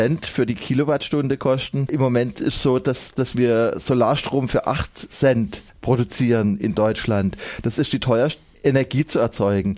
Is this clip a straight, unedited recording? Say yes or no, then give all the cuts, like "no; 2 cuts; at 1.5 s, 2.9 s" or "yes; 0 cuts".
no; 1 cut; at 8.5 s